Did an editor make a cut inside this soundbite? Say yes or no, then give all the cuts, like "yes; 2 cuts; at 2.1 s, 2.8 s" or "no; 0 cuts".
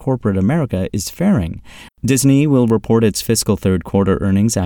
yes; 1 cut; at 1.9 s